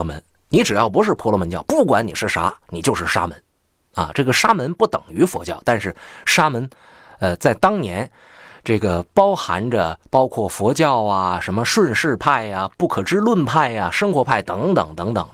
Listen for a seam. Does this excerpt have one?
no; 0 cuts

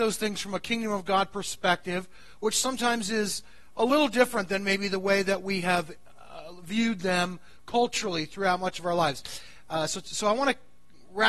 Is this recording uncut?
yes; 0 cuts

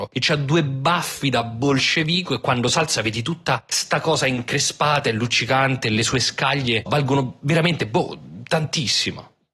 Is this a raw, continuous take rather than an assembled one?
no; 1 cut; at 6.9 s

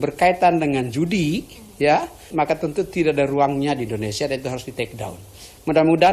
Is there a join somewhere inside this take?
yes; 1 cut; at 2.3 s

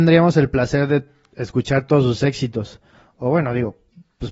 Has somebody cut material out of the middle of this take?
no; 0 cuts

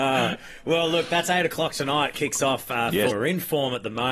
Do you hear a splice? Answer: yes; 1 cut; at 3.1 s

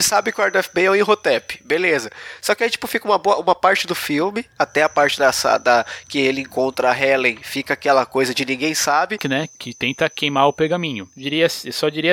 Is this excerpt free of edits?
no; 1 cut; at 9.2 s

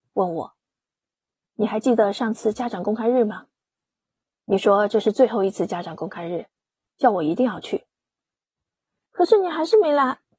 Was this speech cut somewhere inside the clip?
yes; 1 cut; at 9.1 s

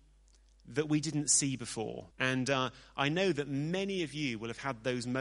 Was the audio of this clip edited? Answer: yes; 1 cut; at 2.1 s

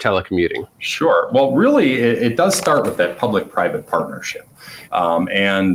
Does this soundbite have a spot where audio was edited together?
yes; 1 cut; at 4.8 s

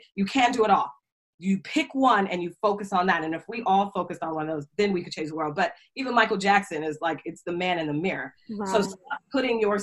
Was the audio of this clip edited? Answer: no; 0 cuts

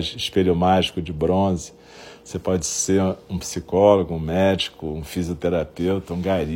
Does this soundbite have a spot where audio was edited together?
no; 0 cuts

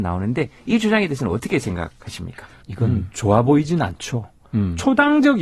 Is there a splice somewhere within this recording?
yes; 1 cut; at 2.6 s

